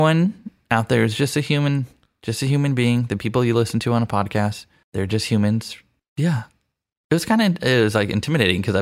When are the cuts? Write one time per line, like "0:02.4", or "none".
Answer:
0:06.0